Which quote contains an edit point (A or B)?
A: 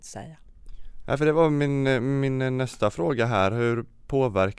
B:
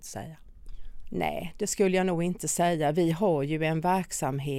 B